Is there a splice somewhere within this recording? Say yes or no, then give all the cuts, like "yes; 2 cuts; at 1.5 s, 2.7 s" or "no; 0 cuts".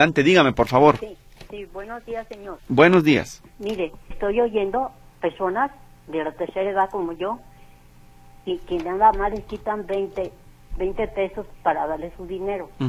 yes; 1 cut; at 4.1 s